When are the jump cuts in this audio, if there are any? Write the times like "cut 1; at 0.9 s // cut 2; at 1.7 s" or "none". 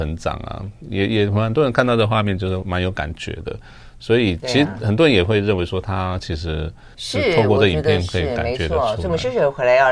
cut 1; at 6.9 s